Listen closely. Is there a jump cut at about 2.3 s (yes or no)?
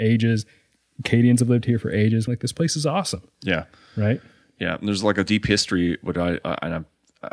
yes